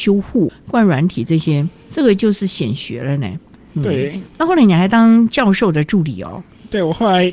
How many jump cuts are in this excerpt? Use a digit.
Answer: 0